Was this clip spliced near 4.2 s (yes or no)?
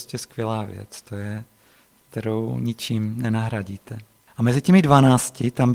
no